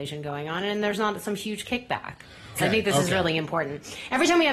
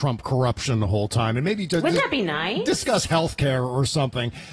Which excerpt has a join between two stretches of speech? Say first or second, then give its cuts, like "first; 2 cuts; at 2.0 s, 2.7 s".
first; 1 cut; at 2.6 s